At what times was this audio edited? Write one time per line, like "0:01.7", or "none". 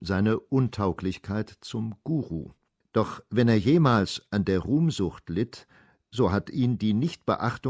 0:02.8

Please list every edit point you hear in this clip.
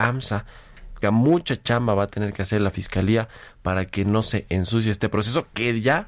0:01.0

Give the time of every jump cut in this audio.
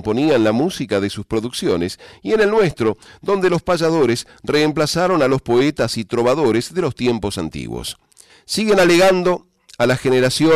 0:08.3

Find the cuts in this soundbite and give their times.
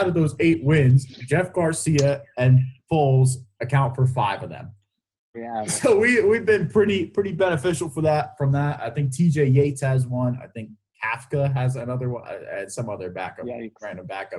0:05.3

